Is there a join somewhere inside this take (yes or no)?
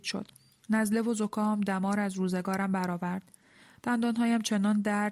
no